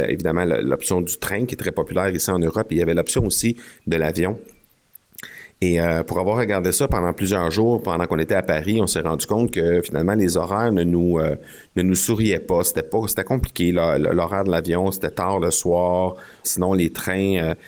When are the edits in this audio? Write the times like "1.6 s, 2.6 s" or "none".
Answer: 16.4 s

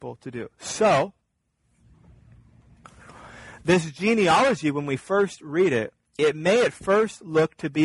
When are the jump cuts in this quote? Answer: 6.2 s

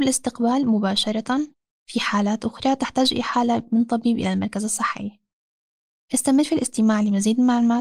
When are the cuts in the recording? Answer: none

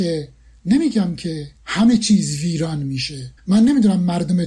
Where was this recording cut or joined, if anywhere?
3.4 s

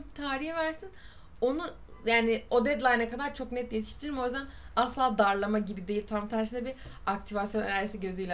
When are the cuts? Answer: none

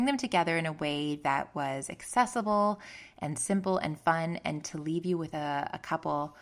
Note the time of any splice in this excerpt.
none

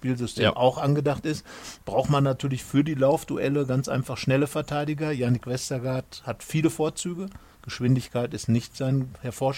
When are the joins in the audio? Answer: none

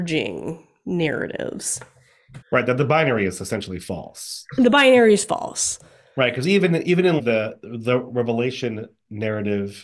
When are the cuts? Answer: 2.4 s, 7.2 s

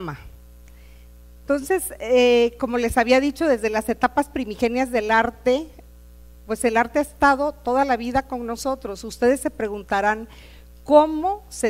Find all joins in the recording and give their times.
none

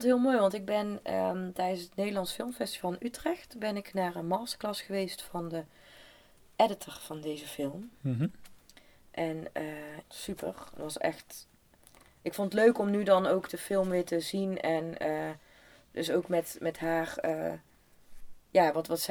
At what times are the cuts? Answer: 10.0 s

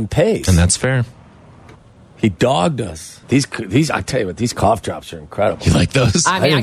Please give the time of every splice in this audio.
3.2 s

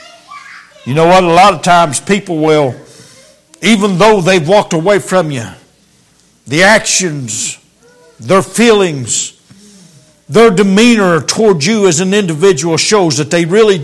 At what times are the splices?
none

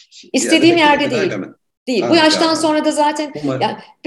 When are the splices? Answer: none

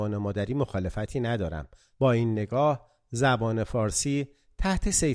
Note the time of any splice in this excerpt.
1.9 s

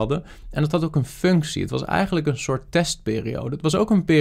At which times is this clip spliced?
none

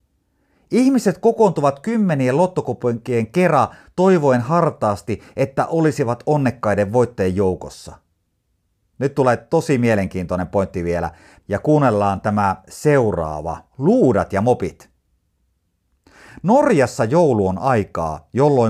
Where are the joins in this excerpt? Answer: 11.4 s, 13.7 s

